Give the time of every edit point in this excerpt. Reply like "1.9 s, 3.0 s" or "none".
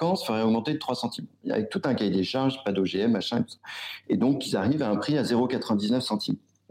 none